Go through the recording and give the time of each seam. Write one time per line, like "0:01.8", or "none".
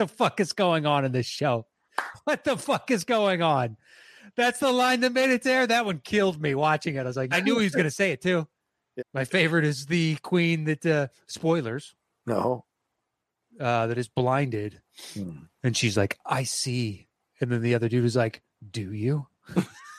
0:07.3
0:09.0